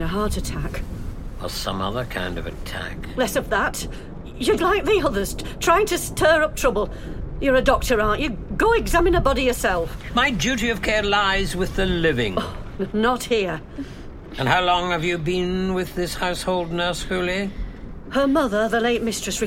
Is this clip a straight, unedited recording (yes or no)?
no